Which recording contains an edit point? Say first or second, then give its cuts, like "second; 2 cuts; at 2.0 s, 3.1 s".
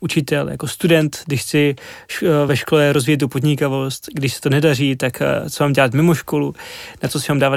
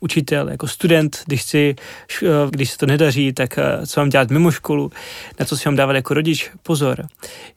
second; 1 cut; at 2.5 s